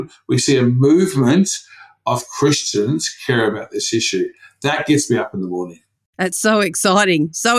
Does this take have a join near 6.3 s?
no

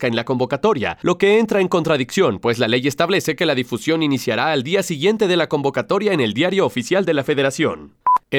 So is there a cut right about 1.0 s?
no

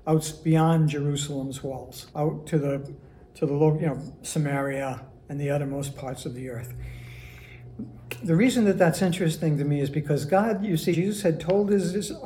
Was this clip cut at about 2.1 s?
yes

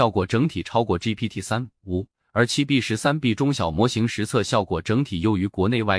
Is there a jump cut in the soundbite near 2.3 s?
no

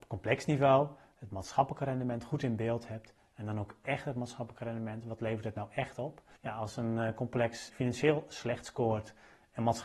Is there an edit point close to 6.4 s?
yes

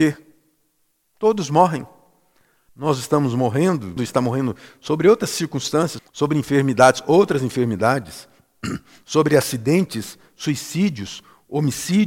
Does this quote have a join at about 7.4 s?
no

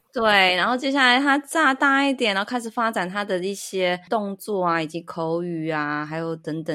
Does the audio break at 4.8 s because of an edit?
no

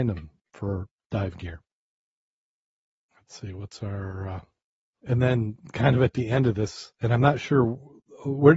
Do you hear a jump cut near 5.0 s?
yes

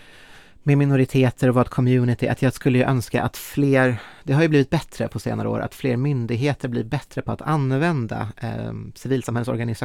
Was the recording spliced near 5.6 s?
no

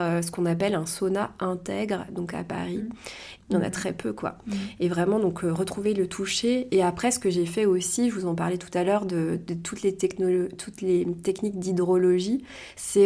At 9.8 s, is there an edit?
no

